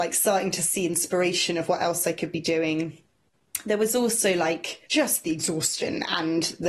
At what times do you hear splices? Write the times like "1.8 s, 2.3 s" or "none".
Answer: 4.9 s